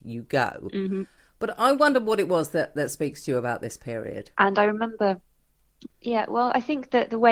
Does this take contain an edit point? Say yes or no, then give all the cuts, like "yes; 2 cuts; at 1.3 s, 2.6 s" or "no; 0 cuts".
yes; 3 cuts; at 1.2 s, 4.3 s, 5.9 s